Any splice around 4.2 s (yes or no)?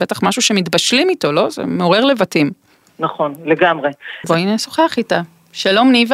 yes